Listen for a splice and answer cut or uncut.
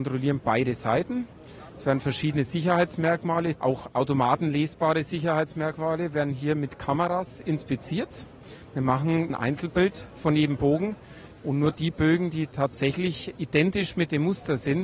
cut